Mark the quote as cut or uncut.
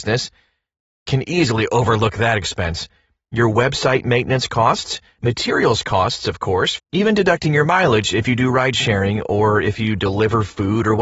cut